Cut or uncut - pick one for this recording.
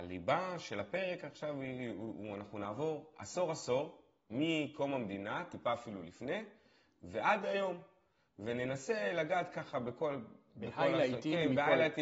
uncut